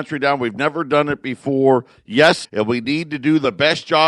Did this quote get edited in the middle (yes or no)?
yes